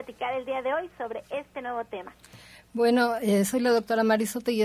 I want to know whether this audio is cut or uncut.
uncut